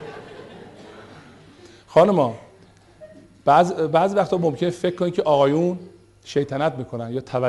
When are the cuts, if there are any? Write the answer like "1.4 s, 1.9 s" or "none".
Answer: none